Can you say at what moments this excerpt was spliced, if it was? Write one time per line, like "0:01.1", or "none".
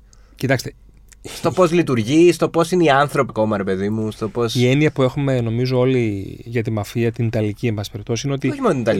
0:03.3